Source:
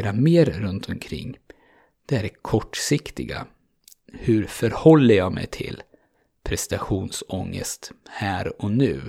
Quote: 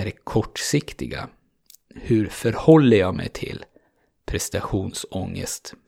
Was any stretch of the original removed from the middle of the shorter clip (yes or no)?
no